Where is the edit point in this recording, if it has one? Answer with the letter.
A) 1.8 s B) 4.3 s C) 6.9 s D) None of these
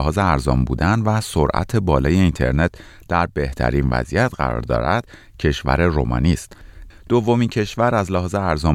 C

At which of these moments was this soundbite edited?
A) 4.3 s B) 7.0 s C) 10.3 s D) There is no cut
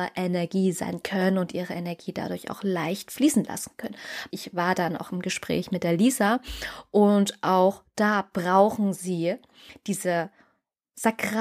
A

